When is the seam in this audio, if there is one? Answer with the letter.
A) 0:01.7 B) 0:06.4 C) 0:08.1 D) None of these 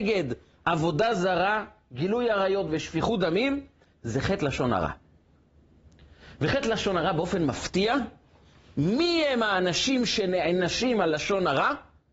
D